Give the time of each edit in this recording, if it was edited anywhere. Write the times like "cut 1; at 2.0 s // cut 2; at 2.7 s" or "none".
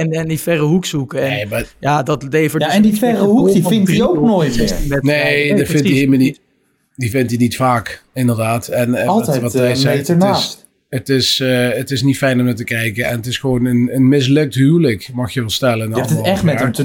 none